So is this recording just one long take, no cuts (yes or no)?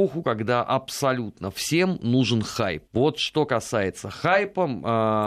no